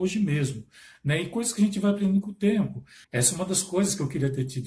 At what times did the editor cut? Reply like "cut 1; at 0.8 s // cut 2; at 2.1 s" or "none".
cut 1; at 3.0 s